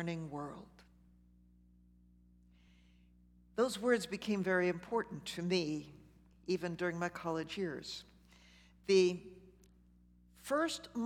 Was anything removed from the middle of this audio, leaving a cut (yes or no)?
no